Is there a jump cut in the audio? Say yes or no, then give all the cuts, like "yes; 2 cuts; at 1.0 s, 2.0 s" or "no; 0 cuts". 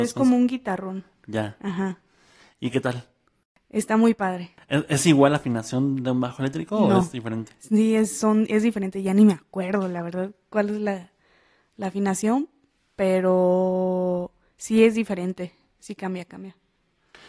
no; 0 cuts